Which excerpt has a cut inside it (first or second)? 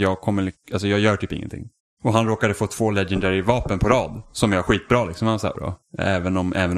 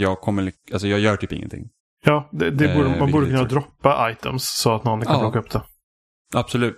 first